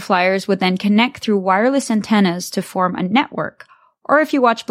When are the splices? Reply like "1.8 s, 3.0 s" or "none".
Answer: none